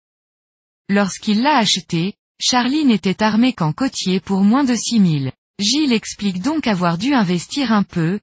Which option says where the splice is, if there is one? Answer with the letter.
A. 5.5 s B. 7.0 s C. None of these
A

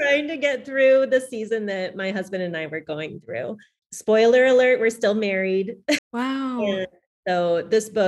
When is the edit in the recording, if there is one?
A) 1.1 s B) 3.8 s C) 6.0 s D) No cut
C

